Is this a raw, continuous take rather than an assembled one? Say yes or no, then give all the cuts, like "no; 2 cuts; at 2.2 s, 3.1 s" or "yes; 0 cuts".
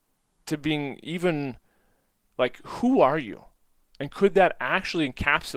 yes; 0 cuts